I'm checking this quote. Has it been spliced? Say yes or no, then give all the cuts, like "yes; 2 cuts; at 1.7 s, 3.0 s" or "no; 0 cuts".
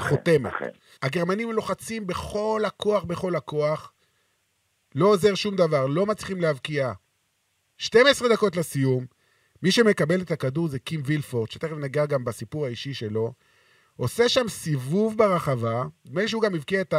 yes; 1 cut; at 0.9 s